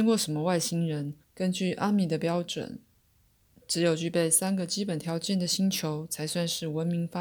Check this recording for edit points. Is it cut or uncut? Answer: cut